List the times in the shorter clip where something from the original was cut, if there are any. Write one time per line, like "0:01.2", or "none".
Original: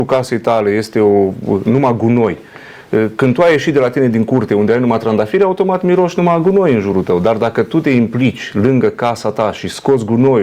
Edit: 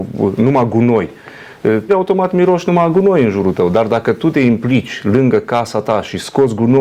0:01.9